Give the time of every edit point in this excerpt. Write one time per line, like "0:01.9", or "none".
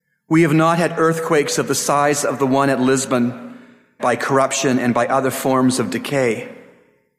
0:04.0